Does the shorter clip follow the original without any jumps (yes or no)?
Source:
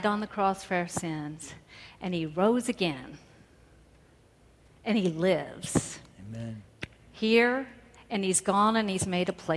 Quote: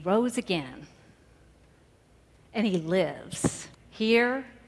no